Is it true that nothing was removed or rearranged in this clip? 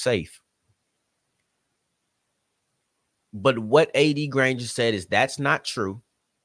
yes; 0 cuts

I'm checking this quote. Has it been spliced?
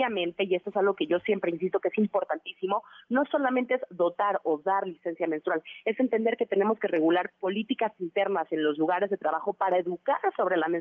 no; 0 cuts

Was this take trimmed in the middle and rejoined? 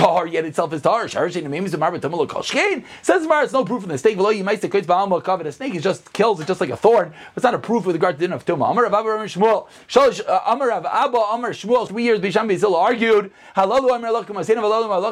yes; 1 cut; at 11.9 s

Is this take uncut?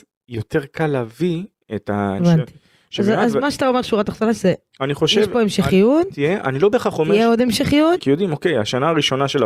no; 2 cuts; at 2.2 s, 8.0 s

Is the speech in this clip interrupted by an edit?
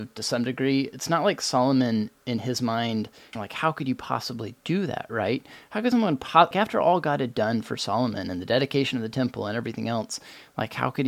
yes; 2 cuts; at 3.3 s, 6.5 s

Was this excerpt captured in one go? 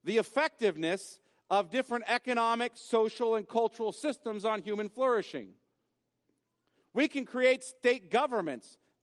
yes; 0 cuts

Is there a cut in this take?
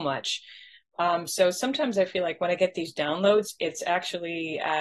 no; 0 cuts

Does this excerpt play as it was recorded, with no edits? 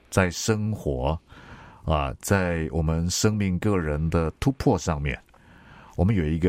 yes; 0 cuts

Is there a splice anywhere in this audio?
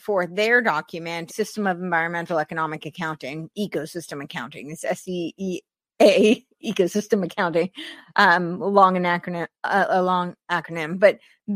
yes; 1 cut; at 1.3 s

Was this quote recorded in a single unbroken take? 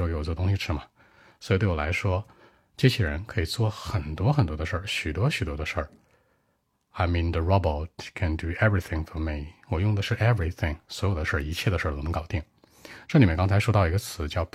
yes; 0 cuts

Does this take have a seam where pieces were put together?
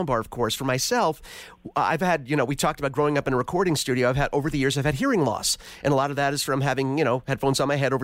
no; 0 cuts

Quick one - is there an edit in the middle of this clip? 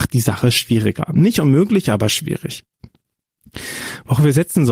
no; 0 cuts

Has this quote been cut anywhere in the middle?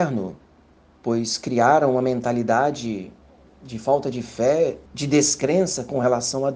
yes; 2 cuts; at 1.0 s, 4.9 s

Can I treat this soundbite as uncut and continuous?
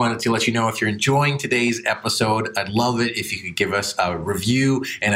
yes; 0 cuts

